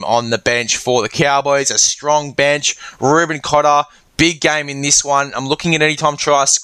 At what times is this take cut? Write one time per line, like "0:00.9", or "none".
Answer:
none